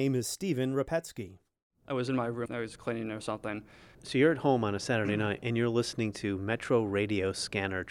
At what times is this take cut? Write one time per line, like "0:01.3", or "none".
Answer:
0:02.5
0:03.9